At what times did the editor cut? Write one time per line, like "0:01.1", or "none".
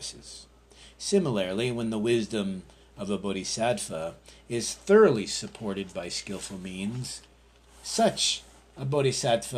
none